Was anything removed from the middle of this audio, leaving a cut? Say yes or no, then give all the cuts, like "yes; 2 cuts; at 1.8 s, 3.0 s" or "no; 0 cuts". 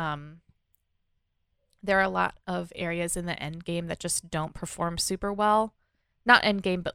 no; 0 cuts